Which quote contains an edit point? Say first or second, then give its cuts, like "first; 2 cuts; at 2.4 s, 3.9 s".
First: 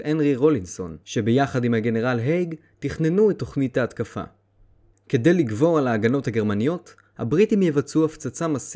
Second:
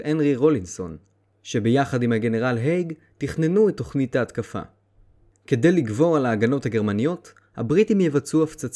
first; 1 cut; at 1.0 s